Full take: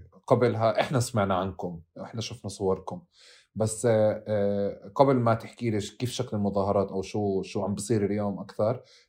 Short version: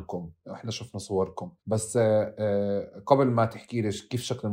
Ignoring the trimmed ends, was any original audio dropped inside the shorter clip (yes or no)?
yes